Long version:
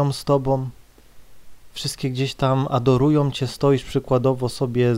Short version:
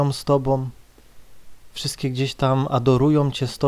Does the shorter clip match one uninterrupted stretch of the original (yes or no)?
yes